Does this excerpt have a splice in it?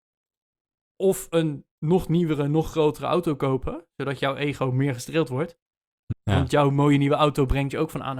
yes; 1 cut; at 6.1 s

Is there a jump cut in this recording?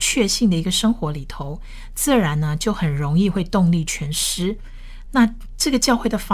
no; 0 cuts

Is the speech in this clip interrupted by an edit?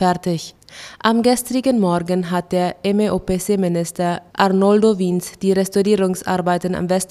no; 0 cuts

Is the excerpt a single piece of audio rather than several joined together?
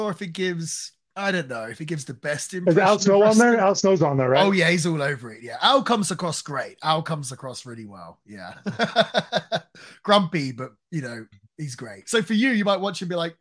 no; 1 cut; at 12.0 s

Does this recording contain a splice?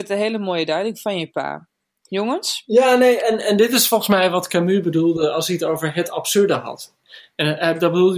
no; 0 cuts

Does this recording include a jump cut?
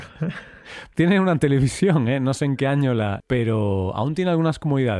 yes; 2 cuts; at 0.9 s, 3.2 s

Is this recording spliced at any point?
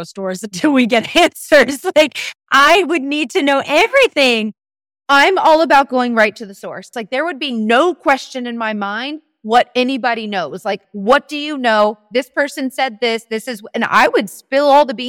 yes; 2 cuts; at 6.9 s, 10.8 s

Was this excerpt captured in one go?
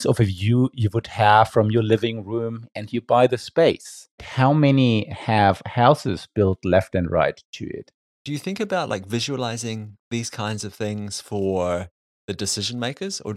no; 2 cuts; at 4.2 s, 8.1 s

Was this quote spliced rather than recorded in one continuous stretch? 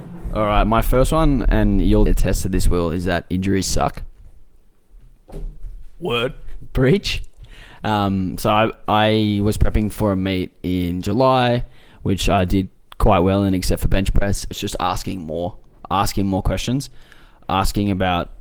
yes; 2 cuts; at 2.1 s, 14.5 s

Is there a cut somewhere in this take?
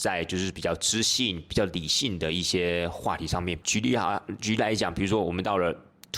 yes; 1 cut; at 3.6 s

